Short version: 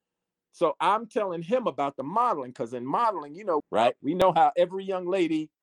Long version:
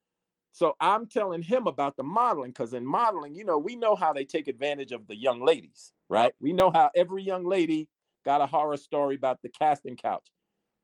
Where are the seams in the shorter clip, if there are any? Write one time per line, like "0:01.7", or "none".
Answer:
0:03.6